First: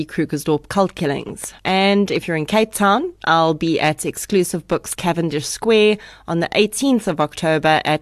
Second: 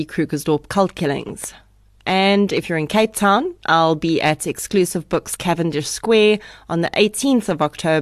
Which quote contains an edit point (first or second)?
first